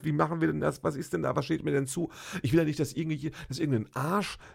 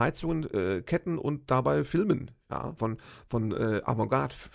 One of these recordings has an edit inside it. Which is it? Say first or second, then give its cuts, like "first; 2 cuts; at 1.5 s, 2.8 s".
second; 1 cut; at 2.8 s